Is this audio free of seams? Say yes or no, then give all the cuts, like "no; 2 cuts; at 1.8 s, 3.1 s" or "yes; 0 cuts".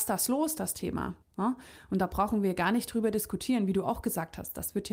no; 1 cut; at 1.2 s